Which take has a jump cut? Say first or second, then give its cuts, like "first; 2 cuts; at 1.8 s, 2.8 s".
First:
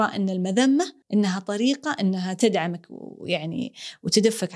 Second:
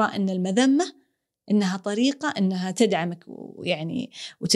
first; 1 cut; at 1.0 s